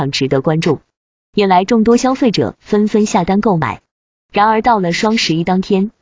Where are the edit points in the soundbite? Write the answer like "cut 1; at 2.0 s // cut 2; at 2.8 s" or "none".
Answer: cut 1; at 1.2 s